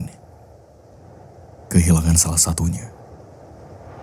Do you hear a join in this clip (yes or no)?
no